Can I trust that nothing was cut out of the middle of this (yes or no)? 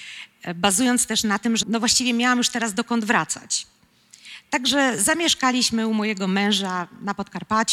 no